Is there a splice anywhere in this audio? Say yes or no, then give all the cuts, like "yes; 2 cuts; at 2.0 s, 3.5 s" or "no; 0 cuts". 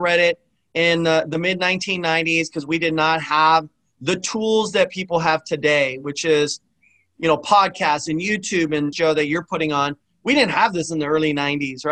yes; 1 cut; at 8.9 s